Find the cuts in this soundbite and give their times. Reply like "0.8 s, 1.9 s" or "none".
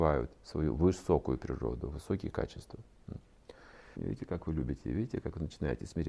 4.0 s